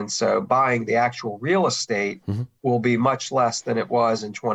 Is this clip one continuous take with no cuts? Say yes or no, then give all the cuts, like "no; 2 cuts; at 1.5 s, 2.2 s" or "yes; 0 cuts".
yes; 0 cuts